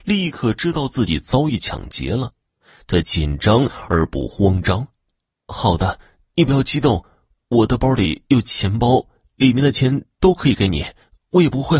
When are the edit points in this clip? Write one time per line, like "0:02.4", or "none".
none

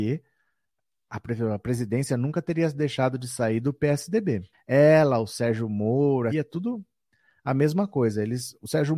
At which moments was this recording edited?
0:04.5
0:06.3

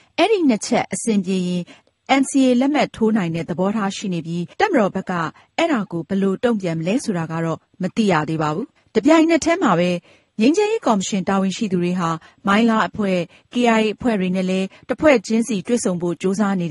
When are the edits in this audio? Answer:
0:04.5

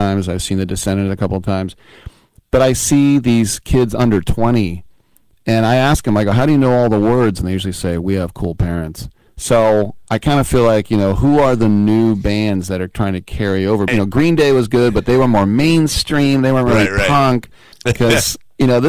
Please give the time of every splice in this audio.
0:09.3
0:13.9
0:17.7

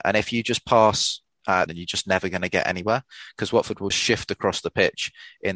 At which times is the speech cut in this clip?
0:01.7
0:03.9

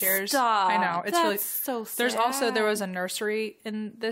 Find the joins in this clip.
none

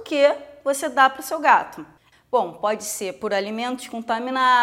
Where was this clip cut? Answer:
0:02.1

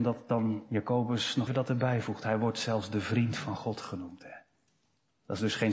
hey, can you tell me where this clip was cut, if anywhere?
0:01.5

